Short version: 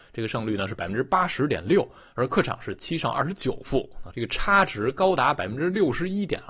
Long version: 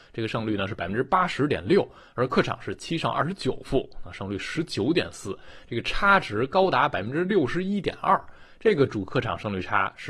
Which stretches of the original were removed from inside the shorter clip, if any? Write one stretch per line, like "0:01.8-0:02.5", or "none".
0:04.1-0:05.7